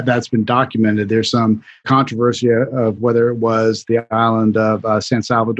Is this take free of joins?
yes; 0 cuts

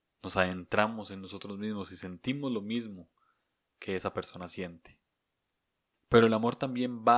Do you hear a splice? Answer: yes; 1 cut; at 5.9 s

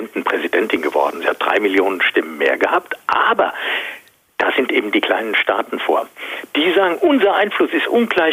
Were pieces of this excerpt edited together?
no; 0 cuts

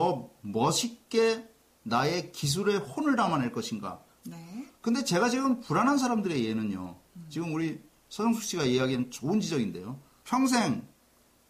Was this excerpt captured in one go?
no; 2 cuts; at 4.2 s, 10.2 s

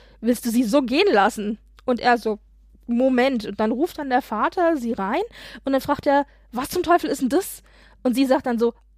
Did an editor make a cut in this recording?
no; 0 cuts

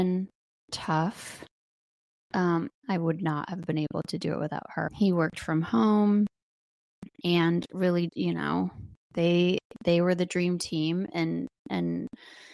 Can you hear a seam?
yes; 3 cuts; at 2.8 s, 4.9 s, 8.1 s

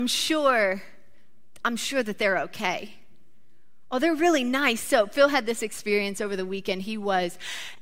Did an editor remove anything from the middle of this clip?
no; 0 cuts

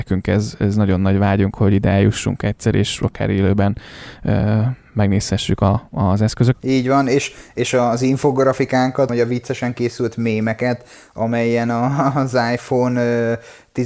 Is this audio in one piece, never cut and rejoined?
no; 2 cuts; at 6.5 s, 9.1 s

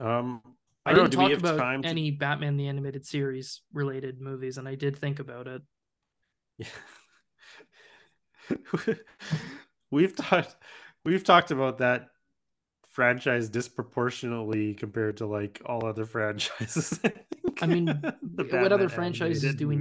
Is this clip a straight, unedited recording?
yes; 0 cuts

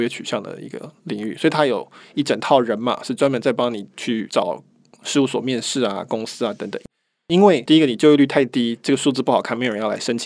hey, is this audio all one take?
yes; 0 cuts

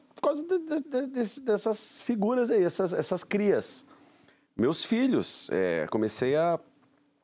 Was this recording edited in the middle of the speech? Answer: no; 0 cuts

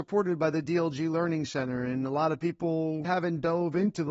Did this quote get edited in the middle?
yes; 1 cut; at 3.0 s

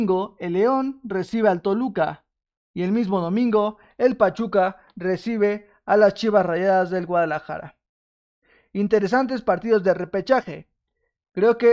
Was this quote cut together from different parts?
no; 0 cuts

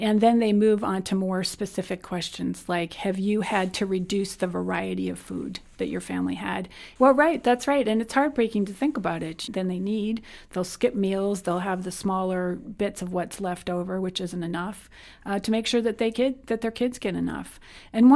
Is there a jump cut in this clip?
yes; 2 cuts; at 7.0 s, 9.5 s

